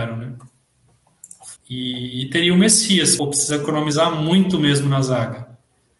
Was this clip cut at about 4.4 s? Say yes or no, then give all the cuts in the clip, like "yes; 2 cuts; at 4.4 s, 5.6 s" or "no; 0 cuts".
no; 2 cuts; at 1.6 s, 3.2 s